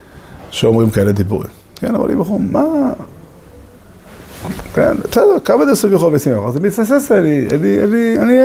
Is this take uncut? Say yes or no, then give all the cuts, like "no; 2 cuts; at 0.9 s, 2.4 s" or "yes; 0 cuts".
yes; 0 cuts